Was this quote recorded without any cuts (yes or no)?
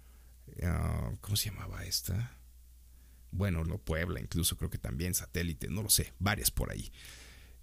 no